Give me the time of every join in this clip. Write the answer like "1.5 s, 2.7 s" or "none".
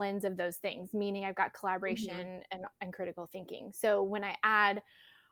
none